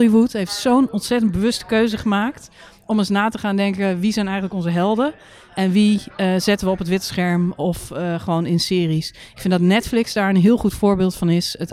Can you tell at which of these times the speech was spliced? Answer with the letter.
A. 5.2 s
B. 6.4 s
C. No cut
C